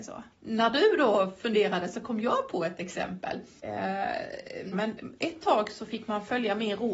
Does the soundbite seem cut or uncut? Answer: cut